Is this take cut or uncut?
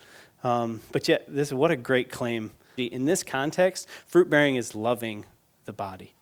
cut